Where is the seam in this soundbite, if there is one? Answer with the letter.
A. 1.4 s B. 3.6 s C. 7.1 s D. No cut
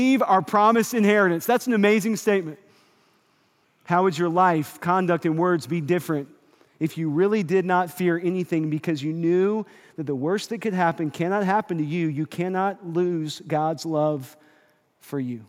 B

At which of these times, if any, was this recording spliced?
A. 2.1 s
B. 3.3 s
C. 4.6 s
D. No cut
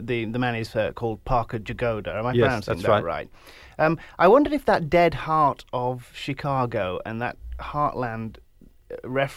D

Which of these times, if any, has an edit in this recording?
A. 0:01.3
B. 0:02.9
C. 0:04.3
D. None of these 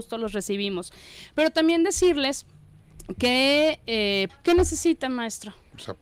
C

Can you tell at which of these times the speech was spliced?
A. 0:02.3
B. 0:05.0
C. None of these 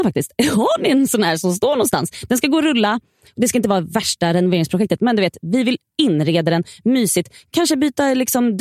C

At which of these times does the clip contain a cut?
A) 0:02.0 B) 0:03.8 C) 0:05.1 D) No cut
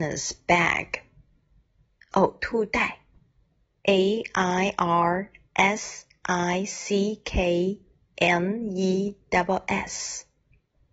B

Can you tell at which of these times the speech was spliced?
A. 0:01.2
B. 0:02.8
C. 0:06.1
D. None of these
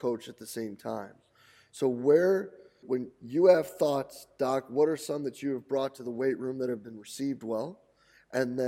B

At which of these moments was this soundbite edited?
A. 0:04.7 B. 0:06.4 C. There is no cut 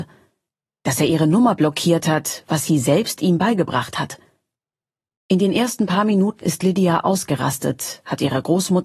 B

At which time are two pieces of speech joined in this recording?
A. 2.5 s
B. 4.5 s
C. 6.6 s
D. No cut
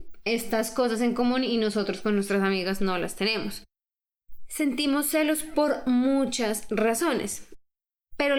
D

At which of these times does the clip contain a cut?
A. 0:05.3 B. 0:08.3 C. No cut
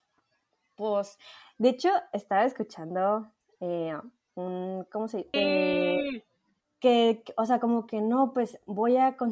A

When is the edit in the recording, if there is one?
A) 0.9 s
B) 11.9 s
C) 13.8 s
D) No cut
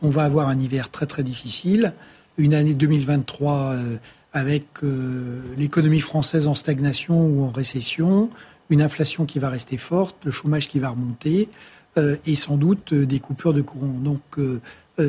D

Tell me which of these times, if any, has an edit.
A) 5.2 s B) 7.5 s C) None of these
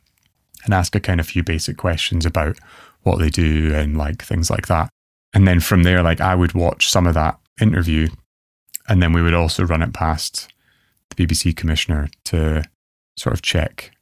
B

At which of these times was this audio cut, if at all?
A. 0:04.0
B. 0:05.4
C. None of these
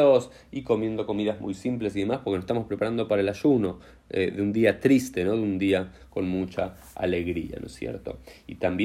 C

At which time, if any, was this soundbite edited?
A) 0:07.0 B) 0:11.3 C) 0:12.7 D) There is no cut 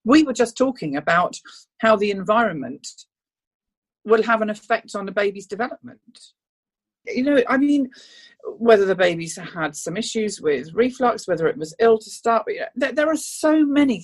A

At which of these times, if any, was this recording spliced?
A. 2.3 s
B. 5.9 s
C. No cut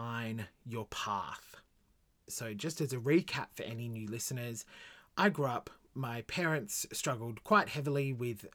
A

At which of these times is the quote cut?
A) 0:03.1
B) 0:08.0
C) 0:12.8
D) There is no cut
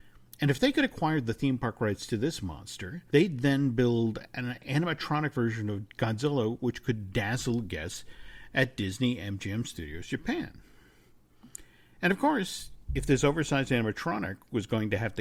A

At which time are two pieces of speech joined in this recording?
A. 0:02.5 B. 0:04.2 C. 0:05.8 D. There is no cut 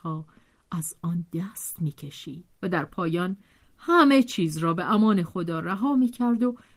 A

